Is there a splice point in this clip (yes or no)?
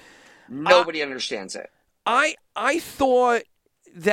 no